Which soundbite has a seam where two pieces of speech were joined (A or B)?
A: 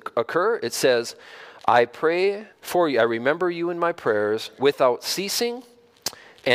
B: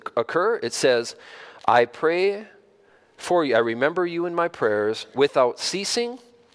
A